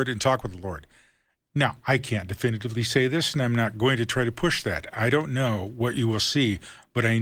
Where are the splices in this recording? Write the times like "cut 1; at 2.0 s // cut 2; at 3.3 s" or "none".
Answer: none